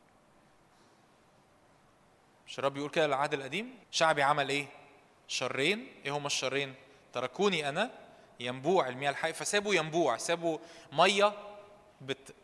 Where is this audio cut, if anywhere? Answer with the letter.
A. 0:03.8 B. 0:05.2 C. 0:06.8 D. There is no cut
A